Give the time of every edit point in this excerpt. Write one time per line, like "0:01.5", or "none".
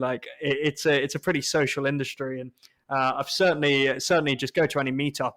none